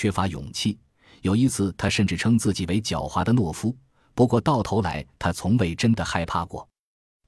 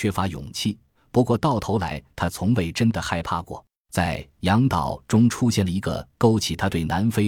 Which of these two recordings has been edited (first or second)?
second